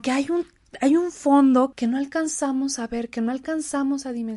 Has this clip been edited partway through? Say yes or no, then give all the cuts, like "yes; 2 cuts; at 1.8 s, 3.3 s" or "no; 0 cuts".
yes; 1 cut; at 1.7 s